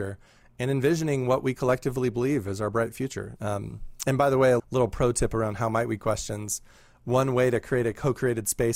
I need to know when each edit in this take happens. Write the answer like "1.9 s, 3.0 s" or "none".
3.4 s, 4.6 s

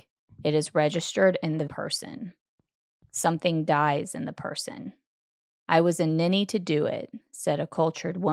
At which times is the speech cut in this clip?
1.7 s

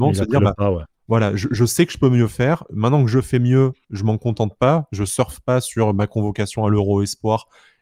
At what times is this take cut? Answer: none

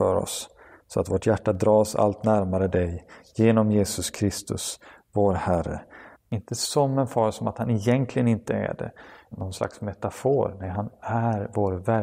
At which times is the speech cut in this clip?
6.1 s, 9.3 s

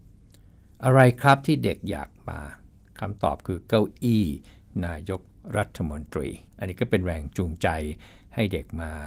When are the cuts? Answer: 6.5 s

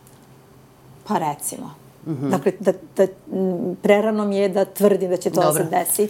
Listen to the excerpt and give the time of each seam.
2.6 s

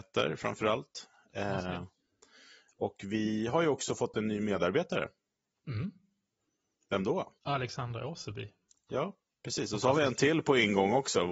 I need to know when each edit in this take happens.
7.4 s

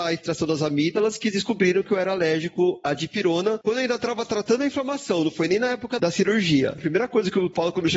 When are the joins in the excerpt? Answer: 6.8 s

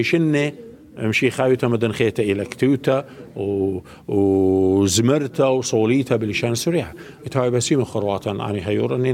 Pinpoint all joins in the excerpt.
none

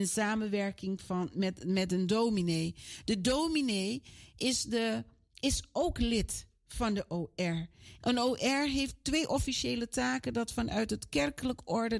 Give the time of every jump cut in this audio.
8.0 s

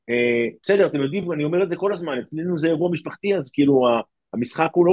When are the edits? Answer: none

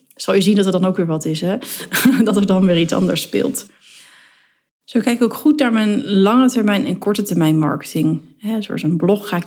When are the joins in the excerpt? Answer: none

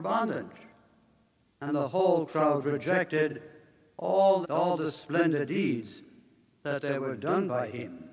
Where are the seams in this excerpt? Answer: 1.4 s, 4.4 s

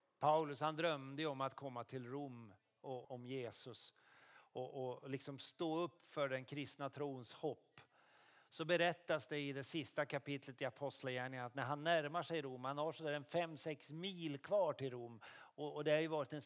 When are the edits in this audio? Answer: 3.0 s

